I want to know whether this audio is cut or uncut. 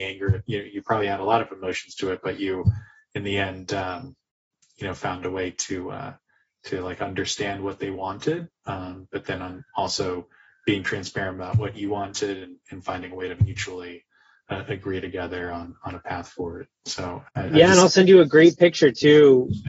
uncut